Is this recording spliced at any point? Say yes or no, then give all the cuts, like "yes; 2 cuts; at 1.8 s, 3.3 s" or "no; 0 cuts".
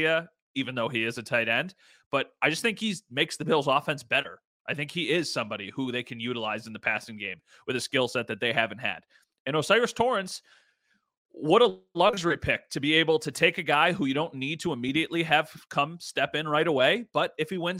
no; 0 cuts